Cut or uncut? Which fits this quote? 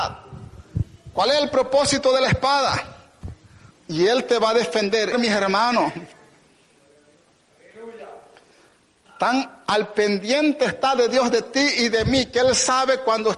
cut